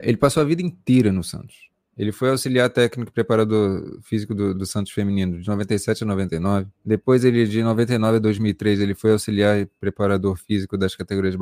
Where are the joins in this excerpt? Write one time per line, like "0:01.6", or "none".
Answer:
0:04.5
0:06.7